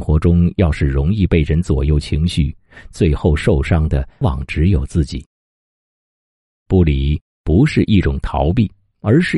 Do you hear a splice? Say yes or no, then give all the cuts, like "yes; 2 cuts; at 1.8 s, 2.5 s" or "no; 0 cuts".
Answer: yes; 1 cut; at 4.2 s